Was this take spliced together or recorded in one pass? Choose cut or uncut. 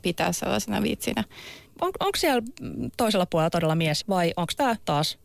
cut